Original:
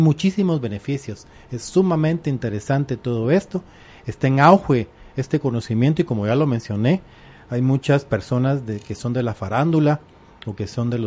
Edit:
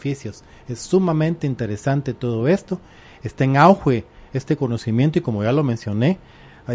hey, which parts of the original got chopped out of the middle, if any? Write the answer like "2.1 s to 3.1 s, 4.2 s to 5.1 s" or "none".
none